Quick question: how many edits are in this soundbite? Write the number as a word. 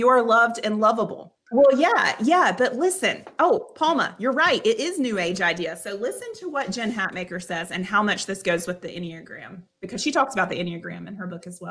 one